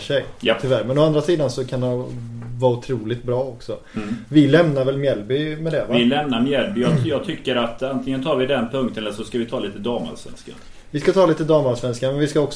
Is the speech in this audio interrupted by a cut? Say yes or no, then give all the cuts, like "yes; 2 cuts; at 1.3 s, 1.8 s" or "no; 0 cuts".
no; 0 cuts